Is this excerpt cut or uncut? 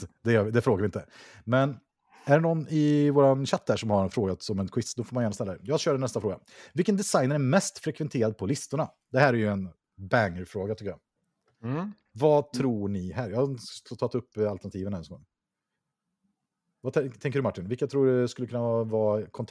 uncut